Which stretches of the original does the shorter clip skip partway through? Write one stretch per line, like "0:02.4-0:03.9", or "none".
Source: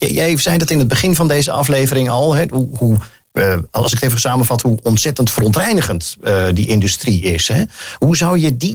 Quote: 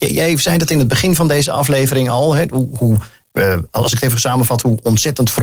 none